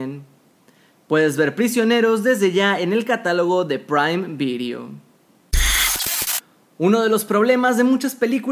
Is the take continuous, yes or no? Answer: yes